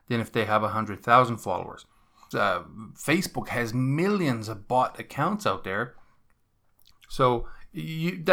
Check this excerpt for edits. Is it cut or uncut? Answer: cut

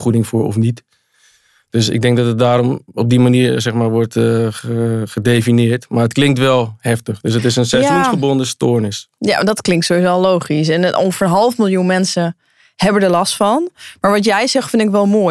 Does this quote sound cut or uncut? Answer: uncut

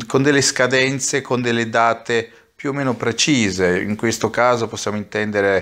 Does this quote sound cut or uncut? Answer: uncut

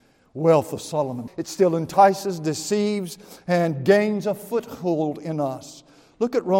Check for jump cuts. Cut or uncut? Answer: cut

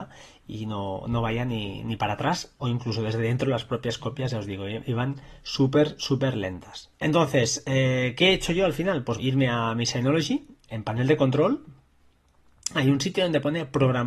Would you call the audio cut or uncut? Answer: cut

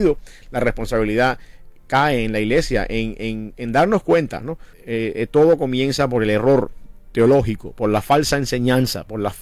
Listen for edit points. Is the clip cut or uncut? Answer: cut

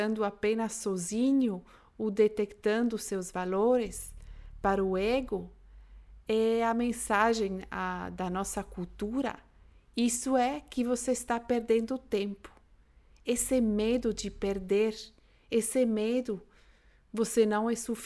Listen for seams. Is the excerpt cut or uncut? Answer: uncut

